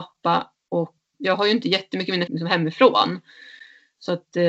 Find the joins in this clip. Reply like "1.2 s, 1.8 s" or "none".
1.1 s, 2.3 s